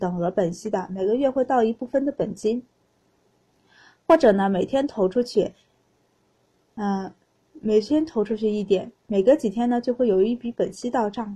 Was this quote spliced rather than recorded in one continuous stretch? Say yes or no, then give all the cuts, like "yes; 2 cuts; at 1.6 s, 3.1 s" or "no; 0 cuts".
no; 0 cuts